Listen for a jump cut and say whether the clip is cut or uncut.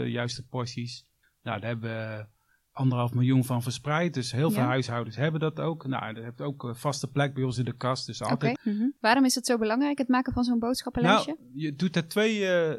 cut